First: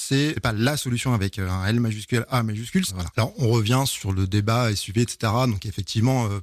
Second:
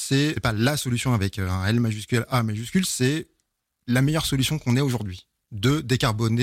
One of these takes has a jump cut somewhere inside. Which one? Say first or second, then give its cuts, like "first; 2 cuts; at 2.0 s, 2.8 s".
first; 1 cut; at 2.9 s